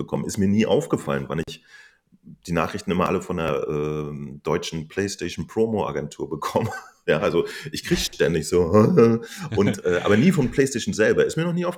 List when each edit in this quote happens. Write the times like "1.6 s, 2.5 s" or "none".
none